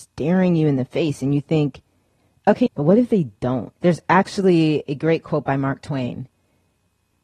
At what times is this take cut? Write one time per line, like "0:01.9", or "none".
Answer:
0:02.7
0:03.8